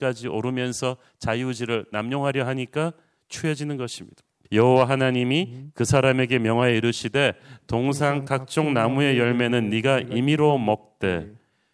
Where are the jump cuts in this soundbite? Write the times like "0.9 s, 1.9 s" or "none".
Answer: 4.4 s